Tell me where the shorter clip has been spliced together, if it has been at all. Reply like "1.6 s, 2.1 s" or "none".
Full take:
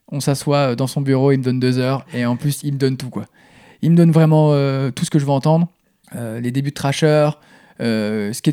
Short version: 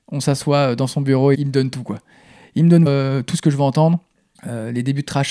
1.3 s, 2.9 s